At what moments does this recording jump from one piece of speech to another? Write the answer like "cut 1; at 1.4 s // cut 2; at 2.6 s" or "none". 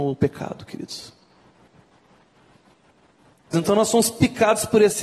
cut 1; at 3.5 s